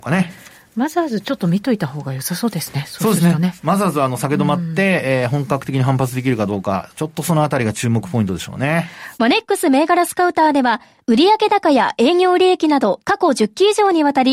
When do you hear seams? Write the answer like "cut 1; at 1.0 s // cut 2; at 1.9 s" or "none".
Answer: cut 1; at 9.1 s // cut 2; at 13.0 s